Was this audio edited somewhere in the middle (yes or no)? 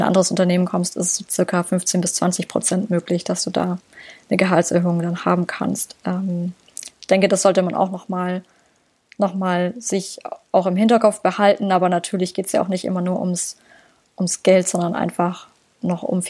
no